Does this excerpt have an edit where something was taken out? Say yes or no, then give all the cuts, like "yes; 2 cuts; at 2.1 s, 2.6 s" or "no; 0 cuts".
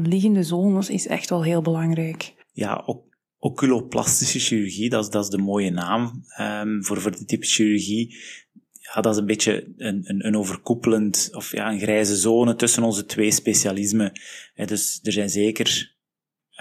no; 0 cuts